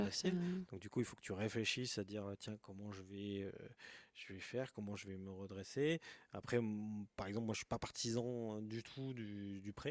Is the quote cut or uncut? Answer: uncut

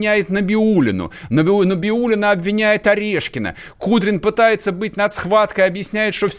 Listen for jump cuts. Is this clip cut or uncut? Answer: uncut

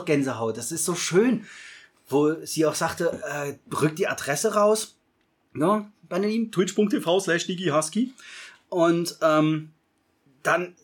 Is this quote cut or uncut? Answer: uncut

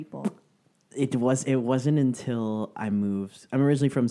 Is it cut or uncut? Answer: uncut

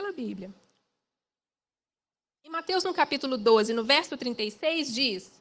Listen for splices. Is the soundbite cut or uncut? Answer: uncut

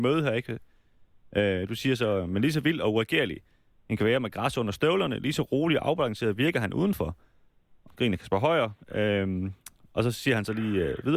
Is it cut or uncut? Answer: cut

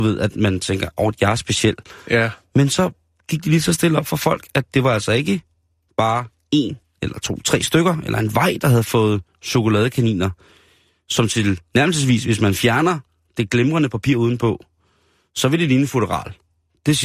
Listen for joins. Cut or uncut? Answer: uncut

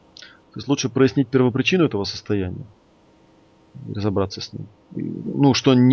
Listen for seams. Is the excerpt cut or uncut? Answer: uncut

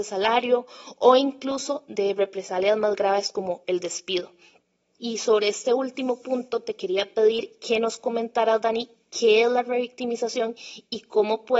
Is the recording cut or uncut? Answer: cut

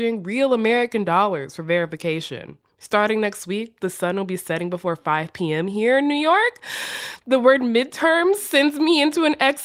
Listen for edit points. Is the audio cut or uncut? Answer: uncut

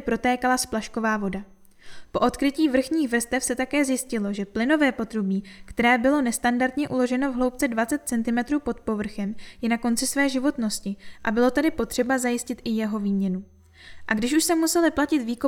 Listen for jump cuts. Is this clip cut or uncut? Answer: uncut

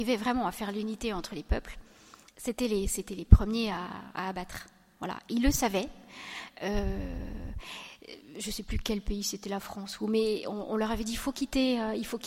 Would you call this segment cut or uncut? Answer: uncut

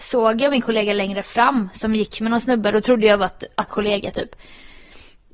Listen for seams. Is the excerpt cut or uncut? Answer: cut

